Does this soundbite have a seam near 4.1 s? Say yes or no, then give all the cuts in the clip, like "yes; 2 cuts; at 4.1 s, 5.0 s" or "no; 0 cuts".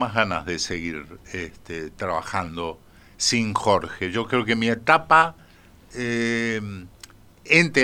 no; 0 cuts